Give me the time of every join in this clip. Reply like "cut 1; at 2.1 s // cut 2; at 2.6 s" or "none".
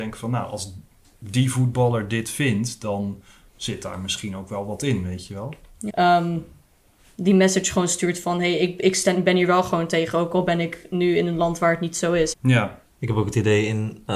cut 1; at 5.9 s // cut 2; at 12.3 s